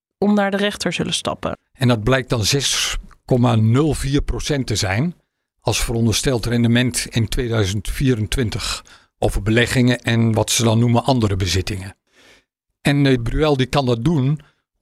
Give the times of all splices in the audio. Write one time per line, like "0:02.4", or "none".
0:01.5
0:13.2